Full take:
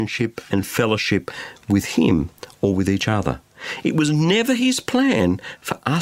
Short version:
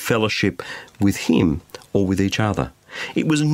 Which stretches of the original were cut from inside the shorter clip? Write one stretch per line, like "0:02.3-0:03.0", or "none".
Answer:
none